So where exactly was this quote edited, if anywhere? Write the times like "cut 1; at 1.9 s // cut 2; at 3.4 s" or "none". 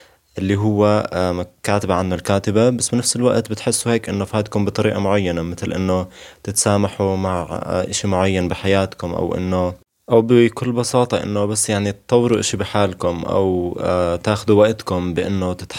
none